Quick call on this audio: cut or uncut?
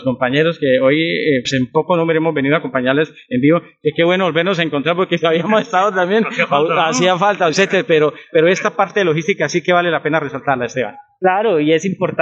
cut